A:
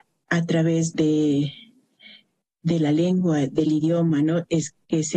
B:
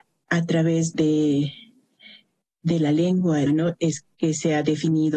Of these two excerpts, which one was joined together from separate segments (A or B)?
B